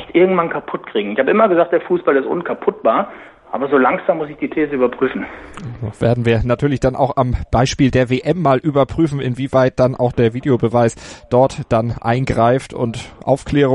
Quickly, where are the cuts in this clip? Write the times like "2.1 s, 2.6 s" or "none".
none